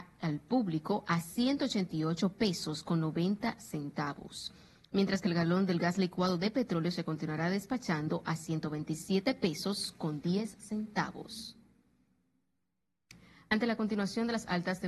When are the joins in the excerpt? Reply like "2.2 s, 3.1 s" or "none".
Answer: none